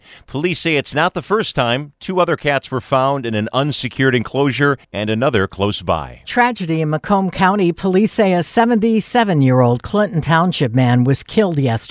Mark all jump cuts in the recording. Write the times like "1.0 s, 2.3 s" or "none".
4.8 s